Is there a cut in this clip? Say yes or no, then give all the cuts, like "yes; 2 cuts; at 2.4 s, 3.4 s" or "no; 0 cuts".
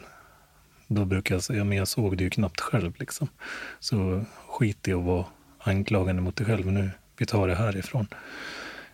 no; 0 cuts